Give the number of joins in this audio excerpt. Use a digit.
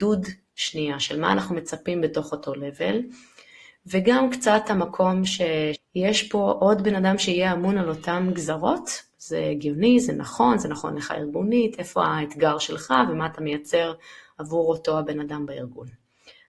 1